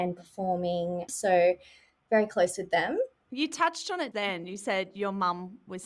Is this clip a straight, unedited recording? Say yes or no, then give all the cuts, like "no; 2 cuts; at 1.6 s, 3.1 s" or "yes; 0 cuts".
no; 2 cuts; at 1.1 s, 4.1 s